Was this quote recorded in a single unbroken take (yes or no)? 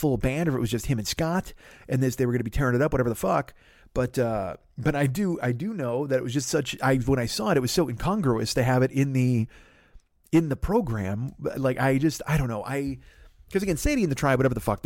yes